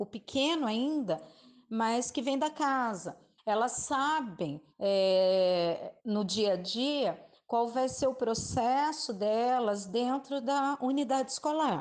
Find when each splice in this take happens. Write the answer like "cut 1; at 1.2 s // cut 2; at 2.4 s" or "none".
cut 1; at 3.4 s // cut 2; at 4.7 s // cut 3; at 6.0 s